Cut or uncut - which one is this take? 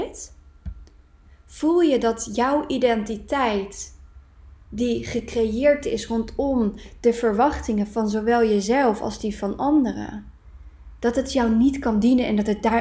uncut